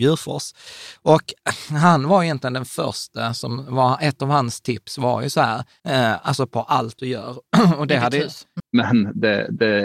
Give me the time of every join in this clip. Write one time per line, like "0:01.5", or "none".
0:05.8
0:08.6